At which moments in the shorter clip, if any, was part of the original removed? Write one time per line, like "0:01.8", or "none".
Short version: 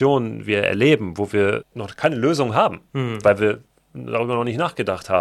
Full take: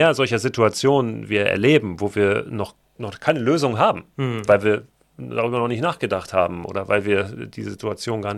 0:01.6